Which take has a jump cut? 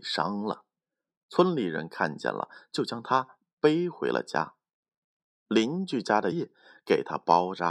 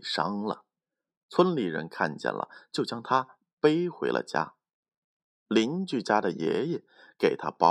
first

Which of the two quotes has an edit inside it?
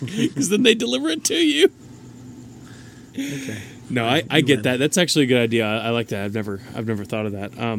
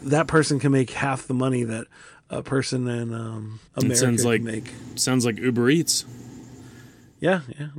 second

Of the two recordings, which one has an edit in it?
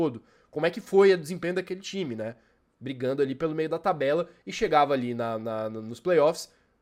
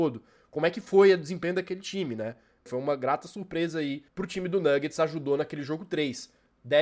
second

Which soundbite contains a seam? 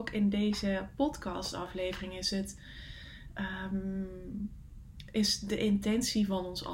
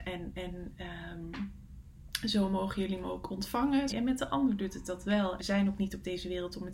second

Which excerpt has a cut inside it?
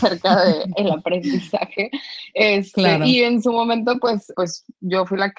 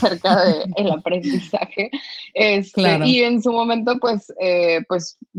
first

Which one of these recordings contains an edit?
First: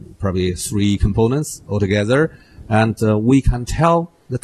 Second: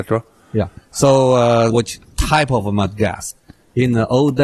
second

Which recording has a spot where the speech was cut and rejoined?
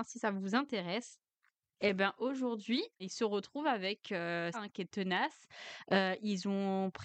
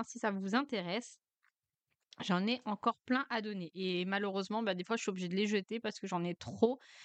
first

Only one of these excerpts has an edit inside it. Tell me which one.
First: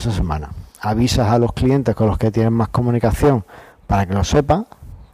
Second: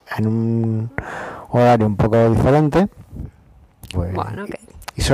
second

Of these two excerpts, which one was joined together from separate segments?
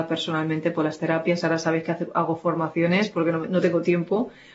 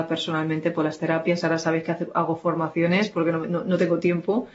first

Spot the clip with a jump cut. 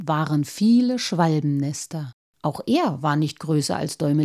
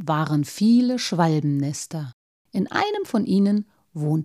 first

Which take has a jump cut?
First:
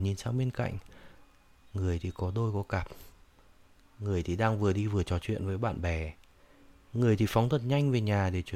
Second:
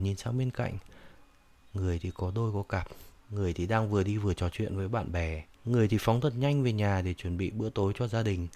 second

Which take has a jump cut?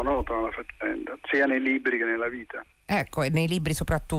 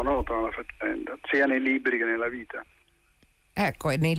first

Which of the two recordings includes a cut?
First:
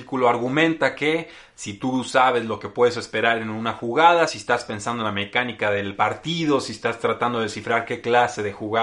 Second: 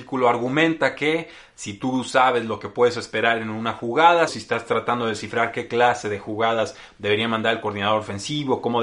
second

